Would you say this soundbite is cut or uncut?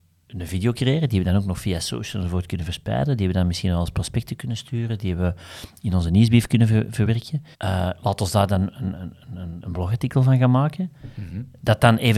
cut